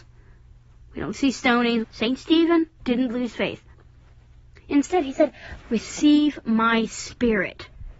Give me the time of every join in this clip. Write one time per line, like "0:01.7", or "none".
0:01.8
0:05.6